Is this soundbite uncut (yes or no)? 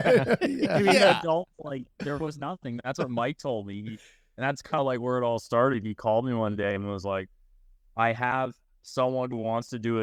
yes